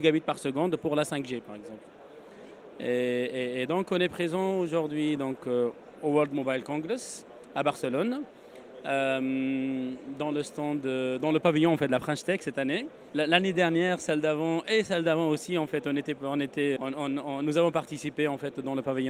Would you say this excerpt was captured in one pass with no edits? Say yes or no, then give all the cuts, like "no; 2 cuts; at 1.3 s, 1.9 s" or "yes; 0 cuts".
no; 1 cut; at 16.8 s